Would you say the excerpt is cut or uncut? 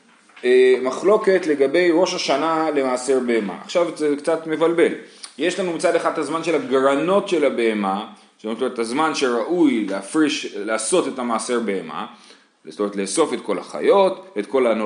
uncut